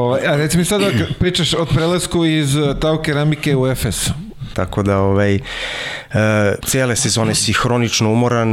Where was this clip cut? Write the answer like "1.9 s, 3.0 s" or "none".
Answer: 4.5 s, 6.6 s

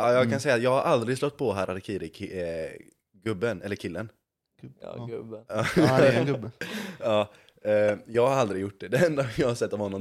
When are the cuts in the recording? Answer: 4.5 s

